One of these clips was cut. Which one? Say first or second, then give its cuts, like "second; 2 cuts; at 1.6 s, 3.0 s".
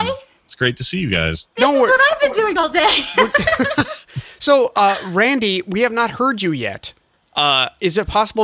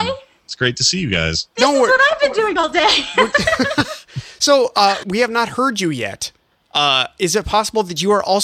second; 1 cut; at 5.0 s